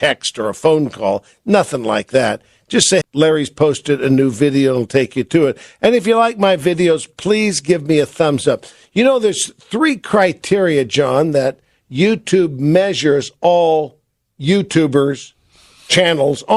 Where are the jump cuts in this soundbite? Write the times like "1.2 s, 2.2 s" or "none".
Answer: 3.0 s